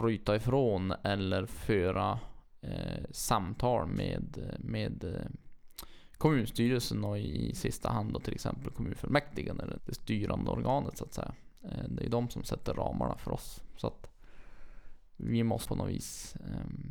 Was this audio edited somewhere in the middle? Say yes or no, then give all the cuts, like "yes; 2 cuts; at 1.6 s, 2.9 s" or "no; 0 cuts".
yes; 1 cut; at 9.8 s